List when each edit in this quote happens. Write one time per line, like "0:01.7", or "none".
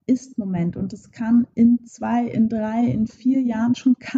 none